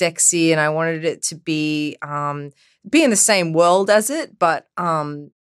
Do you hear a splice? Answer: no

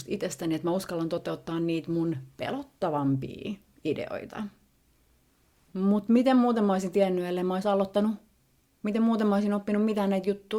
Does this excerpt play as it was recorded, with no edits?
yes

